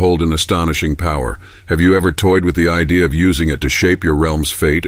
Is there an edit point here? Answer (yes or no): no